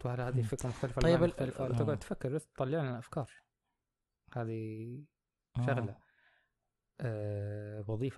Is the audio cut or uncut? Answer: cut